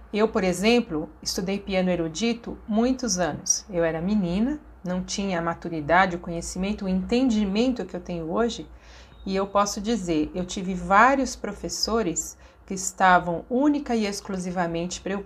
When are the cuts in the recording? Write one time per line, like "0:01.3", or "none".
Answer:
none